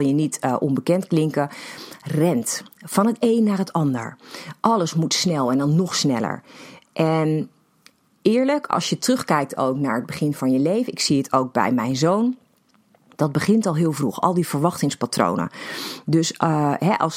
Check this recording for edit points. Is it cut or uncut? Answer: uncut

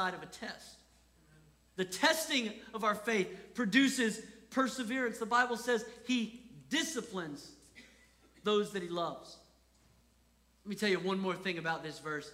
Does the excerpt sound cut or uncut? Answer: uncut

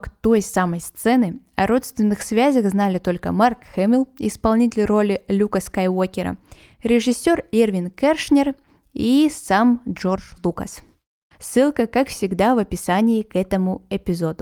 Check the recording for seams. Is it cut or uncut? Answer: cut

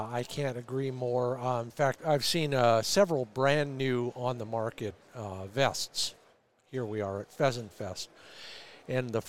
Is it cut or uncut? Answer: cut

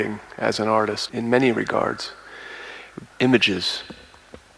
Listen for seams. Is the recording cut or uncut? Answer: cut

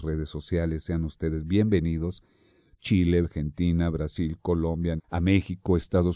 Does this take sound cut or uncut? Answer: cut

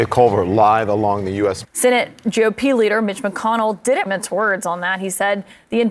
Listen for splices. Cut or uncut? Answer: cut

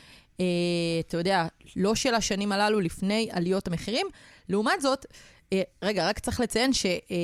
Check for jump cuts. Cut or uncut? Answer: uncut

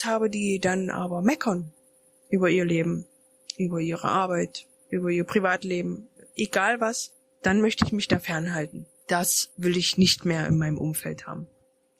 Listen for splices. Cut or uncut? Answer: uncut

